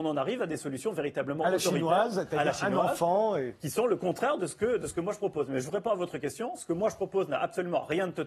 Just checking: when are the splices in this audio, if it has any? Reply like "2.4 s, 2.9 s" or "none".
none